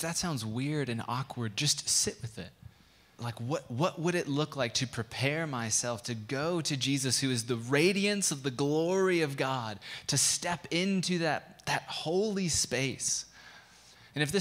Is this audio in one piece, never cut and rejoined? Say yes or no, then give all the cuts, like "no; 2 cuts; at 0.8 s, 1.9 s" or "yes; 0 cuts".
no; 1 cut; at 3.2 s